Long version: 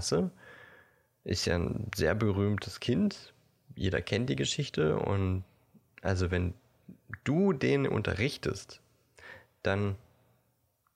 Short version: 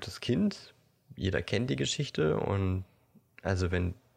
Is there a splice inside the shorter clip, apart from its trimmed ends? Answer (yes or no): no